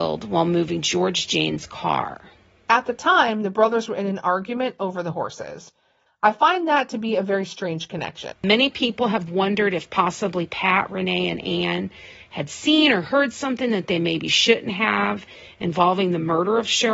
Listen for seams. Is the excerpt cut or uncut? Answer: cut